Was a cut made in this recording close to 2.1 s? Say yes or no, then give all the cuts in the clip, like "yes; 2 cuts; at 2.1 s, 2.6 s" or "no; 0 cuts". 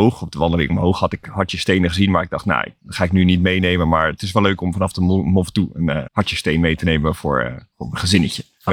no; 2 cuts; at 6.1 s, 7.7 s